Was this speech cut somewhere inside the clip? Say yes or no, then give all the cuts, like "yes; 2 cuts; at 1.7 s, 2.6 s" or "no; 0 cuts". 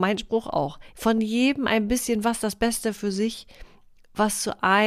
yes; 1 cut; at 0.9 s